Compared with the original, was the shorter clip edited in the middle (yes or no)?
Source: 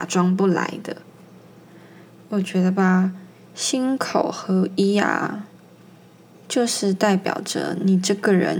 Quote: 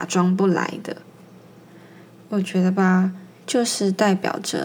yes